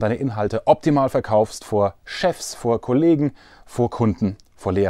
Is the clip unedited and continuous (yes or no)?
yes